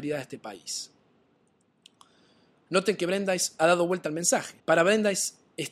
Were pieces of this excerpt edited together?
yes; 1 cut; at 4.6 s

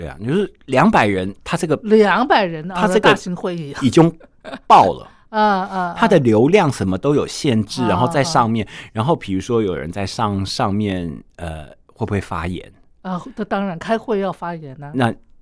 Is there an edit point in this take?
no; 0 cuts

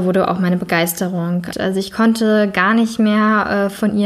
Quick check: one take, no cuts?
no; 1 cut; at 1.5 s

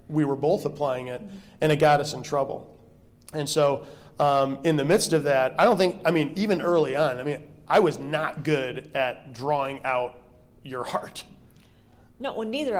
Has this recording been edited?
no; 0 cuts

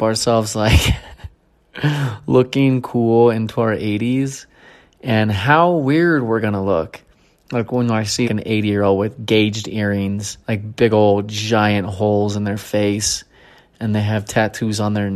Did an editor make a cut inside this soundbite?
yes; 2 cuts; at 8.2 s, 10.4 s

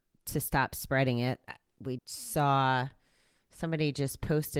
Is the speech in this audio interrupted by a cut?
yes; 1 cut; at 2.0 s

